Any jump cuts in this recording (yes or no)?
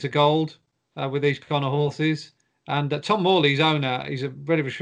no